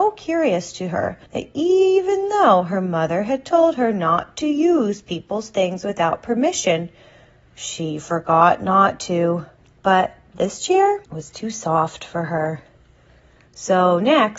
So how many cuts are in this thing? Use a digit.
3